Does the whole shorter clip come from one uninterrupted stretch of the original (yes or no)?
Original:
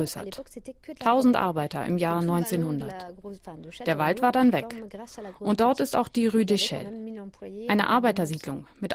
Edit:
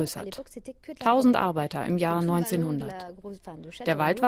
yes